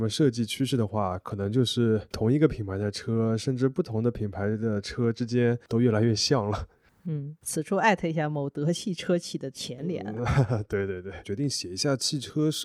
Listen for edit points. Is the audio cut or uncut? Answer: cut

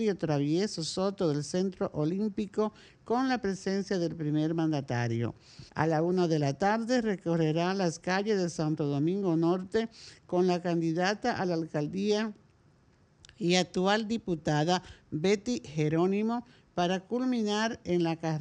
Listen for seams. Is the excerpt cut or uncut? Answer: cut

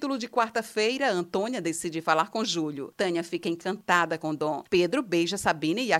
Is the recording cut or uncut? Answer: cut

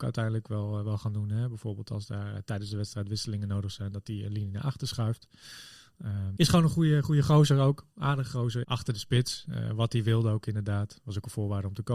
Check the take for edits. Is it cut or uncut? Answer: cut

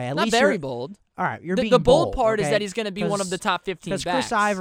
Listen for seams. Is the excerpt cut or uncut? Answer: uncut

